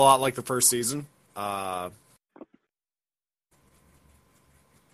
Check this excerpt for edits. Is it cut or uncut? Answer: cut